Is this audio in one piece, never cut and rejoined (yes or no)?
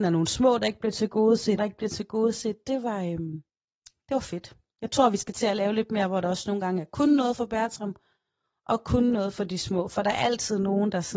no